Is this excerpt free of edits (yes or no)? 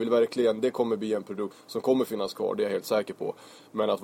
no